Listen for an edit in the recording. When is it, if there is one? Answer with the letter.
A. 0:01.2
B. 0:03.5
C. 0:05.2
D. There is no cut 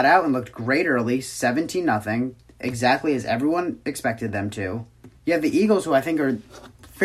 C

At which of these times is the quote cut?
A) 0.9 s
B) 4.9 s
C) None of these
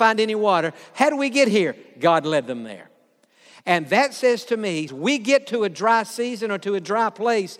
B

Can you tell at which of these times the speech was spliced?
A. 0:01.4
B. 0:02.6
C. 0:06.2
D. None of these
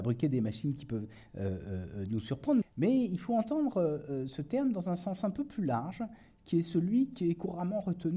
B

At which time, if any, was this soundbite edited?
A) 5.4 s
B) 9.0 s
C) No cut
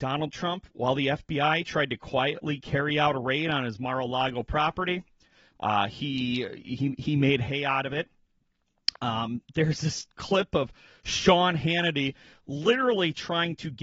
C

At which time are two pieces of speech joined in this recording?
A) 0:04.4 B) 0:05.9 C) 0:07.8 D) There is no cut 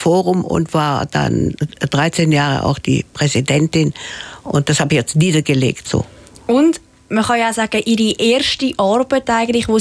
B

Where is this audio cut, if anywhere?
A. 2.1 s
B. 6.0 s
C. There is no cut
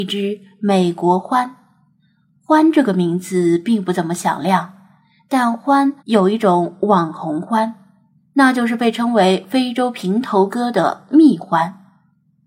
B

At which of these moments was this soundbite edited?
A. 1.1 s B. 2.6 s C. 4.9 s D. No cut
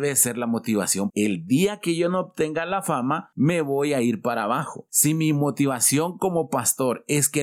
A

